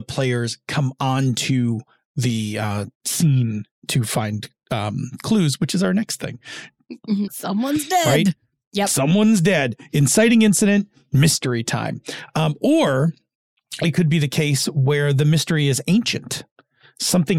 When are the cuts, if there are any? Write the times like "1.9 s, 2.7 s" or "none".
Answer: 7.3 s